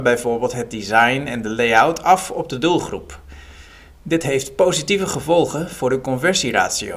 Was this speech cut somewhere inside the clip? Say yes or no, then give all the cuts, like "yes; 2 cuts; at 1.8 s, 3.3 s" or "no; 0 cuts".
no; 0 cuts